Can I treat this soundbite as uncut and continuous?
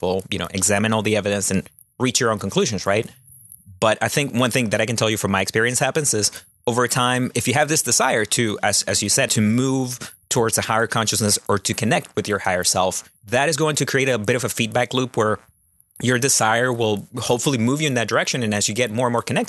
no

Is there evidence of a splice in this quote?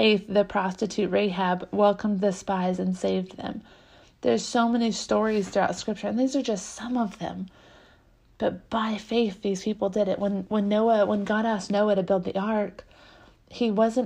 no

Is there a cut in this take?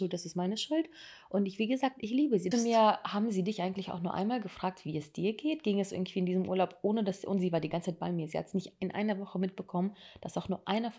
yes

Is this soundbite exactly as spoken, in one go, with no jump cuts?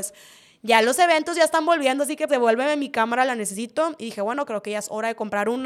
no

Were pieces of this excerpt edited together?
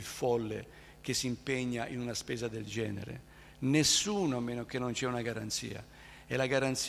no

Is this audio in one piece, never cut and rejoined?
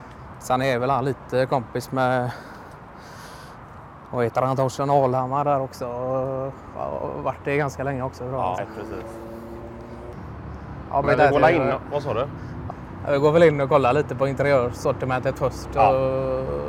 no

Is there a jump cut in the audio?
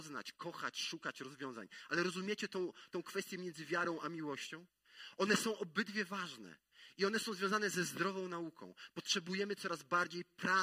no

